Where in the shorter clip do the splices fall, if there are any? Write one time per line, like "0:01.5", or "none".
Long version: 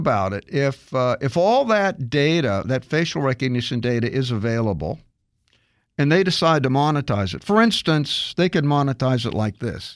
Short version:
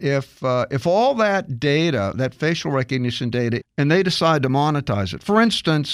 0:03.6